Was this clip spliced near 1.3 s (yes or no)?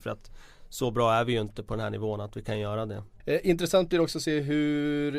no